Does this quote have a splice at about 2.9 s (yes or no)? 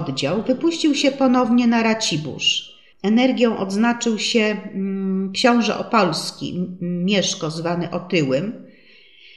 yes